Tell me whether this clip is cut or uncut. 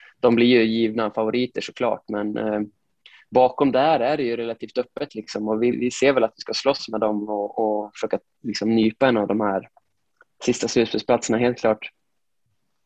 cut